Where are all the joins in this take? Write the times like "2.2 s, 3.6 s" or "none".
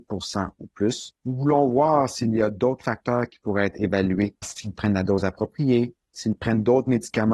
4.4 s

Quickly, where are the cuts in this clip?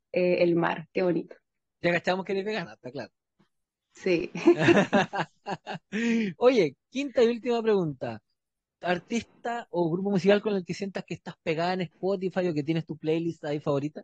none

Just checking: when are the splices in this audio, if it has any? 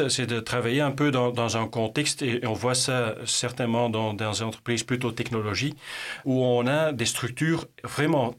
6.2 s

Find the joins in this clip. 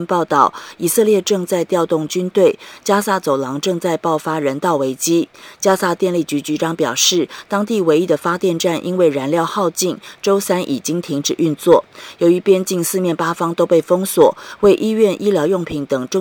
none

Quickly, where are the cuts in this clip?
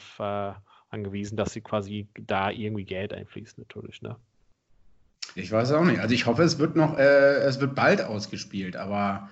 5.4 s

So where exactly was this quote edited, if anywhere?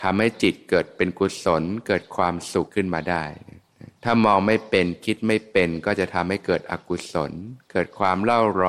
2.7 s, 3.9 s

